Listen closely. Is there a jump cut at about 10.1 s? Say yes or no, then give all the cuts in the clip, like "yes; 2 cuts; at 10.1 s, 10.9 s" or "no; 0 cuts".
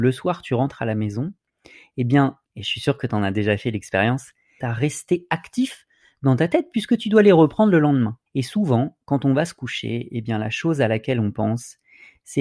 no; 3 cuts; at 2.4 s, 4.6 s, 8.3 s